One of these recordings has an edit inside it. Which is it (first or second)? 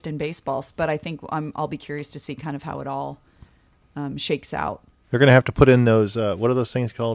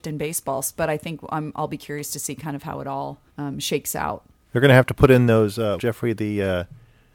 second